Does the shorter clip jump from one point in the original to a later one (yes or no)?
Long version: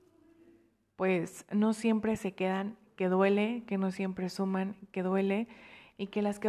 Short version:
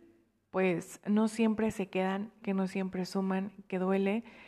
yes